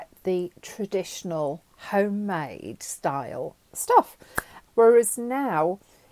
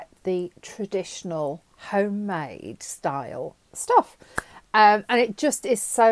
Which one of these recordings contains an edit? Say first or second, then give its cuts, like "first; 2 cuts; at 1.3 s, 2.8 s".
first; 1 cut; at 4.7 s